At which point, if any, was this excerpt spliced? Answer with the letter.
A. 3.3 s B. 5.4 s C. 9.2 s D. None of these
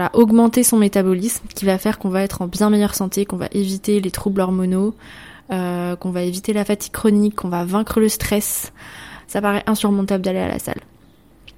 C